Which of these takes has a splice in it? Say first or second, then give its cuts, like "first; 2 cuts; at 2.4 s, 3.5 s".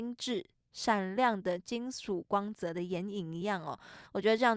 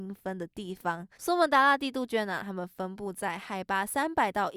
second; 1 cut; at 1.1 s